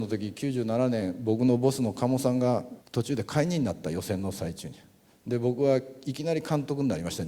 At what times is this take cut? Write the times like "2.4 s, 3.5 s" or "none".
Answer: 2.8 s